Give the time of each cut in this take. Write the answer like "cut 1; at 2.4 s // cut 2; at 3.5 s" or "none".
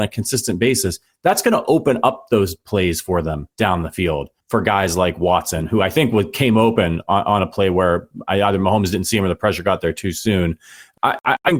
none